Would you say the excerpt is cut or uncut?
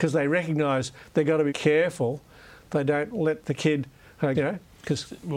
cut